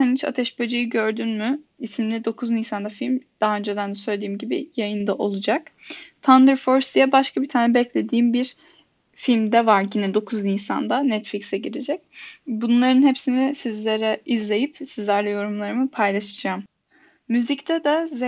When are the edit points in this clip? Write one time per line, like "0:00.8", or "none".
none